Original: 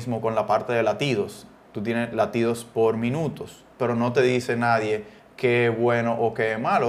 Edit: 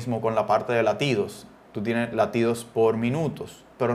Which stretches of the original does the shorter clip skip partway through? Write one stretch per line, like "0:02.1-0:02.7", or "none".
none